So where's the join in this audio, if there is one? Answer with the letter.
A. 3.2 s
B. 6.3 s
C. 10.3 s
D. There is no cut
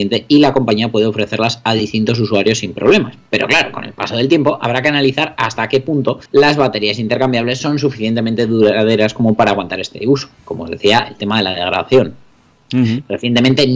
B